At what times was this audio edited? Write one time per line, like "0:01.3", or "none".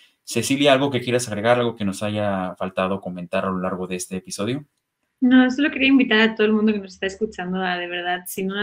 none